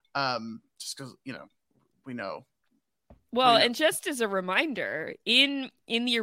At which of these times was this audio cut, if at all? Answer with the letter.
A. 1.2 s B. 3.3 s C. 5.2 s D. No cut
D